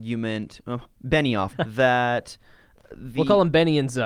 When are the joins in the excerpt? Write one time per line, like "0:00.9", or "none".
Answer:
0:01.5